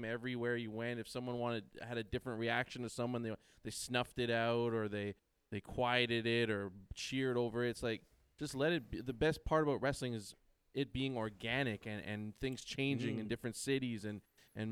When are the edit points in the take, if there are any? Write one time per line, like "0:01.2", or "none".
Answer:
none